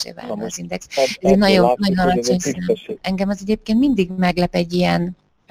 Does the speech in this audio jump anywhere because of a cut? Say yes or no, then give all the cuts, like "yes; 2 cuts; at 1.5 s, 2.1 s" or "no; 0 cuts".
yes; 1 cut; at 3.0 s